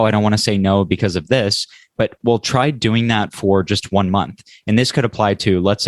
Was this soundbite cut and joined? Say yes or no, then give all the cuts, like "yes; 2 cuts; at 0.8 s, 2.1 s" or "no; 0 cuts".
no; 0 cuts